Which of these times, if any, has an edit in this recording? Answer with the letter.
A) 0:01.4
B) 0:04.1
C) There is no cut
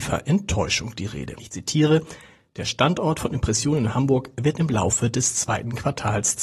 A